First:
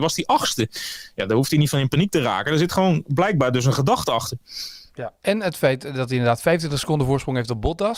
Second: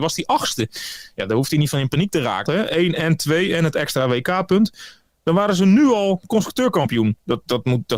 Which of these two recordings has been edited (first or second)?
second